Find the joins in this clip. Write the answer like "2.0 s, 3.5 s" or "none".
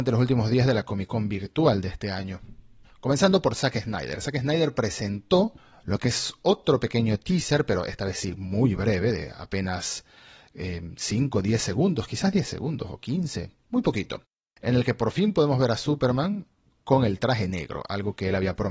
none